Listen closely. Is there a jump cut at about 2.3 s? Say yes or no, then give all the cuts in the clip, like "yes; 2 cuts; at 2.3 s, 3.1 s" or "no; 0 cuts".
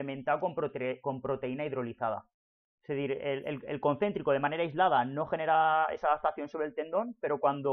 no; 0 cuts